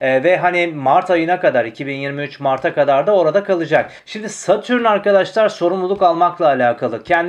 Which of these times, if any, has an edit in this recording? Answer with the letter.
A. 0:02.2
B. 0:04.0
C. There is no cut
B